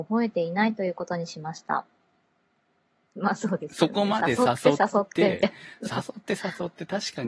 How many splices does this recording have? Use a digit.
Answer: 1